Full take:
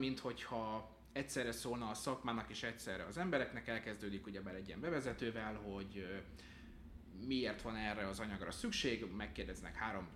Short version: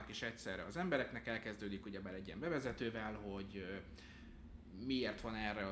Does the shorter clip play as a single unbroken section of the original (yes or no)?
yes